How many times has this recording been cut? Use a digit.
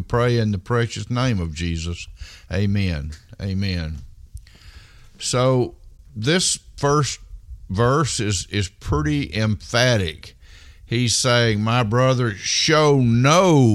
0